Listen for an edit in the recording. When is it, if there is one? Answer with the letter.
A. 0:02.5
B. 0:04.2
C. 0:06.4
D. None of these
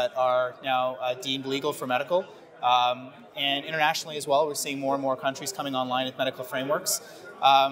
D